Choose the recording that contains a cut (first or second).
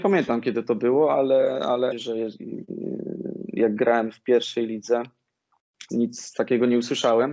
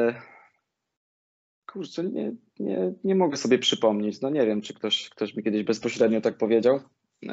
first